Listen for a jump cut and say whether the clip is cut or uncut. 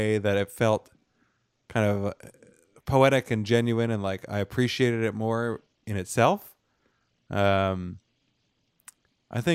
uncut